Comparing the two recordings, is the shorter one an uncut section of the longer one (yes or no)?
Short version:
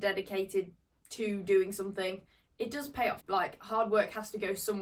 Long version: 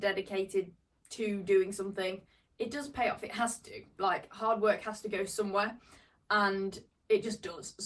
no